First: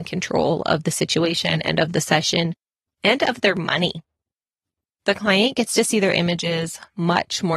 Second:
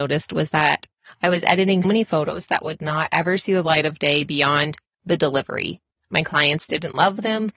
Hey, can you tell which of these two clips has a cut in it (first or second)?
second